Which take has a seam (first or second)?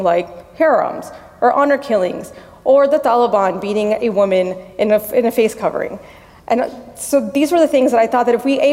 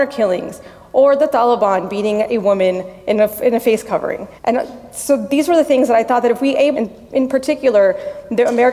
second